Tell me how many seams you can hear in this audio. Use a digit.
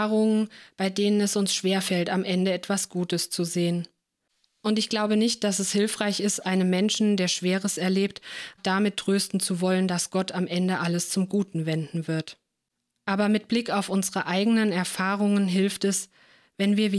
1